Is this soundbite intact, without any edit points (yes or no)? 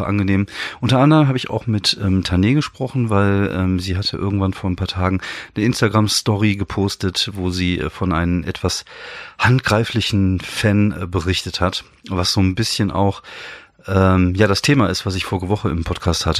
yes